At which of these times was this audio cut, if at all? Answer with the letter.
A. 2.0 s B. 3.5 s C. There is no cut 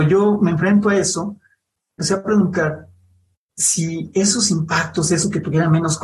A